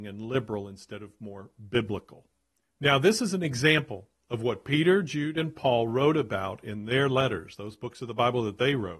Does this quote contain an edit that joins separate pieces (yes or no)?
no